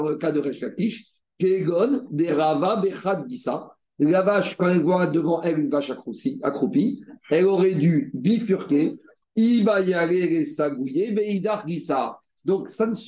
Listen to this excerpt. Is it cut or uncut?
cut